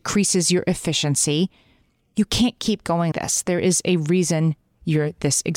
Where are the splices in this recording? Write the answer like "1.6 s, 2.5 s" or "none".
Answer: 3.1 s